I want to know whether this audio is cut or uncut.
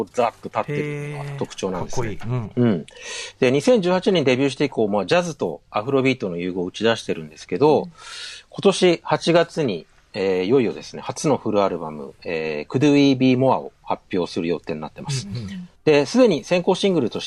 uncut